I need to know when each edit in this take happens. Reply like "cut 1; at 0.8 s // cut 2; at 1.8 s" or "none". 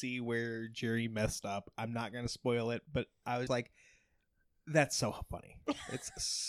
cut 1; at 3.5 s